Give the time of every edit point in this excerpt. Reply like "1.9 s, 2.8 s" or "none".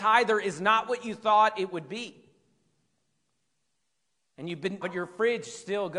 4.8 s